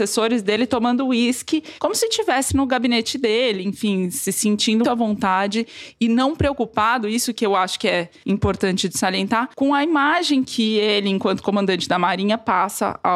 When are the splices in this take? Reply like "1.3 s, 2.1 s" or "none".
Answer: 2.5 s, 4.8 s